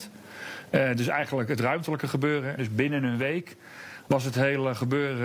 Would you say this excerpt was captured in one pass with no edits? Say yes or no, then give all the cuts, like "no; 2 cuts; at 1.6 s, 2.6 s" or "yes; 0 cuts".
no; 1 cut; at 2.6 s